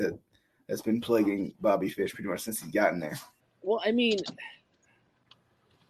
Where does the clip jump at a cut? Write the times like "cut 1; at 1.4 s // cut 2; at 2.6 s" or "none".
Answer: cut 1; at 3.4 s